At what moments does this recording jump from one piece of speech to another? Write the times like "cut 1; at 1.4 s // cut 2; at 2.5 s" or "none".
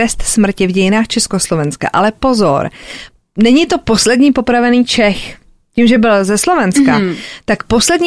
none